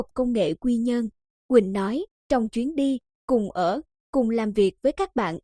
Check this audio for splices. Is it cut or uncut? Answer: cut